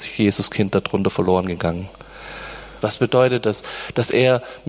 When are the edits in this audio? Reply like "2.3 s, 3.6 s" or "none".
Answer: 2.8 s